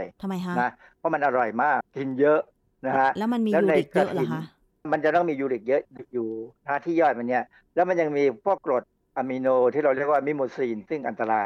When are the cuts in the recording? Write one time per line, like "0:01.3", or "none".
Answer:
0:01.8
0:08.6